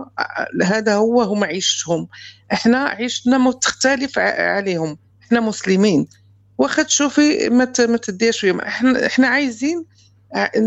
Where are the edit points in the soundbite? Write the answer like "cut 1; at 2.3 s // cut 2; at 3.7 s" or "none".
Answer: none